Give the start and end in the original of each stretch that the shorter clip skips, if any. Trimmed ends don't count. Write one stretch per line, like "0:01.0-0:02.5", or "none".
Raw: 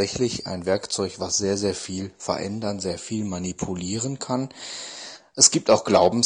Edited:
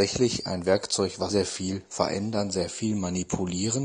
0:01.3-0:01.6